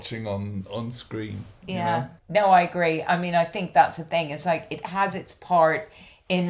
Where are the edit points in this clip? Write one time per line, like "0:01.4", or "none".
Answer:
0:02.2